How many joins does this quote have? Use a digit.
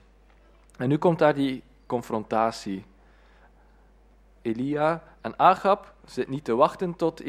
0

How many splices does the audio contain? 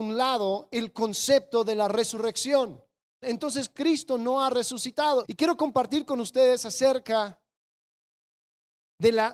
2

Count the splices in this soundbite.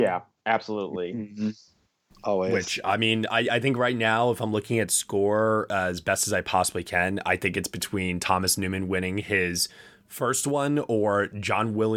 0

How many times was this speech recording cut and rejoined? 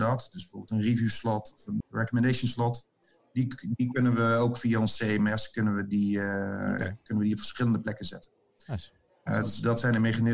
2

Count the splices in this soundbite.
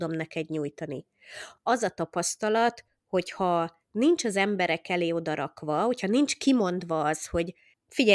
1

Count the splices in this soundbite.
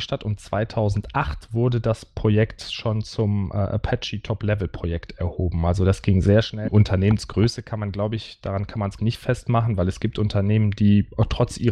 2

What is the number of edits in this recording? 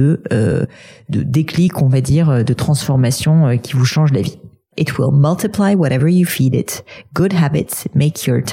1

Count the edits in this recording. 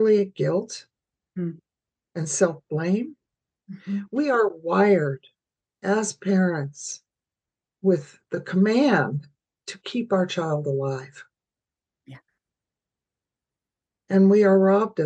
0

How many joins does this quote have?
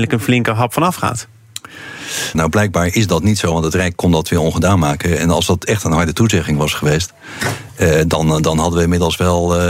1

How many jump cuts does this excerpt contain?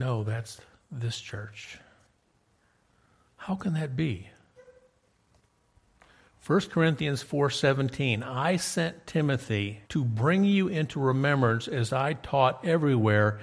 1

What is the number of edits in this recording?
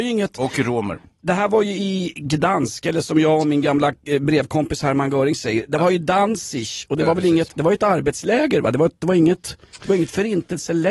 0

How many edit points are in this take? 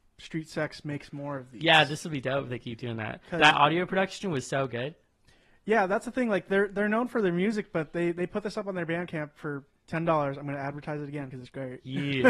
0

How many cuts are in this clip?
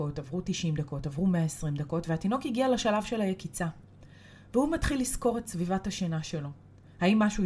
0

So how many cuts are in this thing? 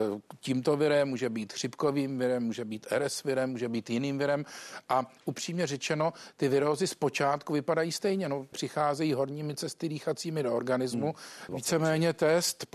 2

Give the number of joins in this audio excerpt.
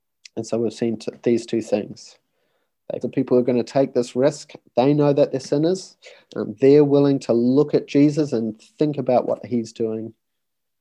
1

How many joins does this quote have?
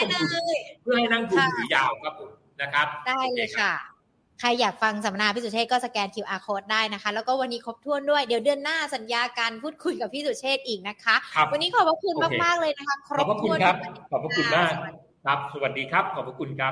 0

